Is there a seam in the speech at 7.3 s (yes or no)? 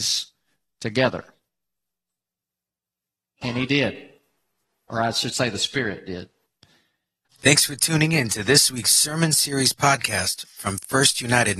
yes